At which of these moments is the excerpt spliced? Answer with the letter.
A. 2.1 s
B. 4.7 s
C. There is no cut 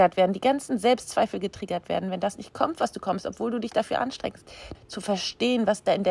B